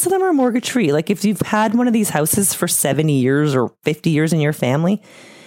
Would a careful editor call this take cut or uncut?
uncut